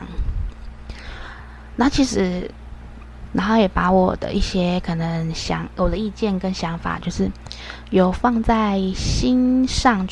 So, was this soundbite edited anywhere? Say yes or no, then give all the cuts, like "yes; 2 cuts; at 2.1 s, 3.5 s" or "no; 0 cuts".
yes; 1 cut; at 3.3 s